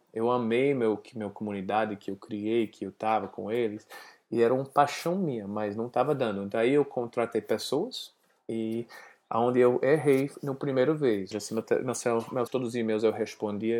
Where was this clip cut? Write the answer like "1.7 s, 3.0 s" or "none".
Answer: 11.3 s, 12.5 s